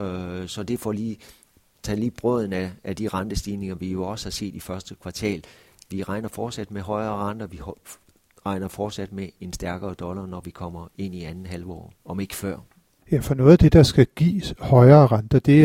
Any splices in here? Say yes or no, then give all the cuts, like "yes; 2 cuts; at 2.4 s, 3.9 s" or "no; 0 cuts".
yes; 1 cut; at 5.9 s